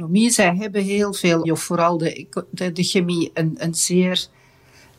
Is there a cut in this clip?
yes; 1 cut; at 1.4 s

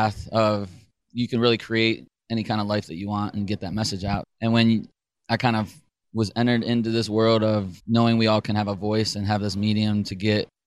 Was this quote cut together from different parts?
yes; 2 cuts; at 4.2 s, 7.8 s

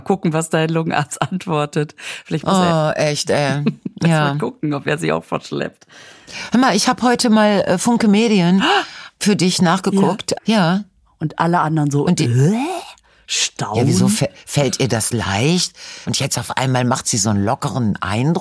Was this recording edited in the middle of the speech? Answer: yes; 2 cuts; at 10.4 s, 16.0 s

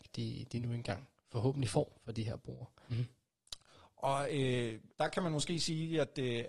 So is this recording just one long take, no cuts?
no; 2 cuts; at 2.9 s, 4.9 s

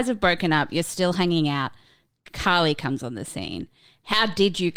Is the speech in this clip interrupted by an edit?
no; 0 cuts

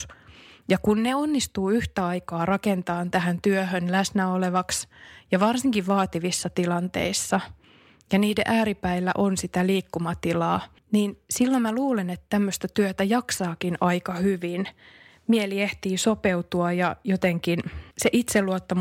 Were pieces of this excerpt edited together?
yes; 1 cut; at 17.9 s

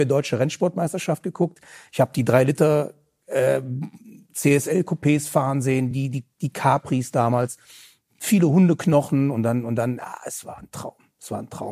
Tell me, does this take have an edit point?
no; 0 cuts

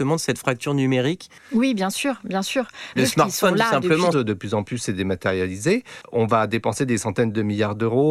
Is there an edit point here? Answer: yes; 2 cuts; at 3.0 s, 4.1 s

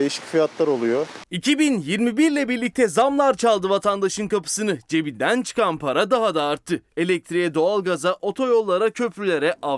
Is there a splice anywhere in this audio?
no; 0 cuts

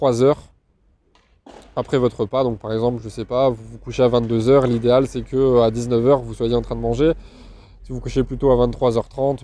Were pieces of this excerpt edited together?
no; 0 cuts

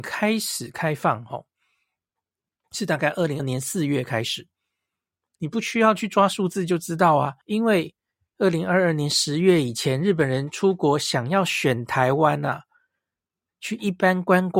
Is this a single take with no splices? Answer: no; 3 cuts; at 3.4 s, 5.4 s, 7.4 s

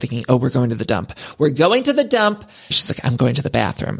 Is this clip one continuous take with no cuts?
no; 1 cut; at 2.7 s

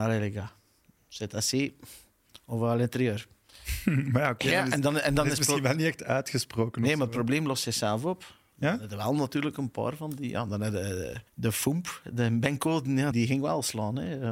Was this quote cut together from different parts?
yes; 2 cuts; at 11.3 s, 13.1 s

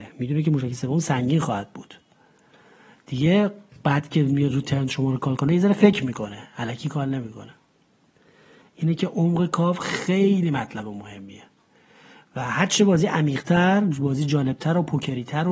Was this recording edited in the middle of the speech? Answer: no; 0 cuts

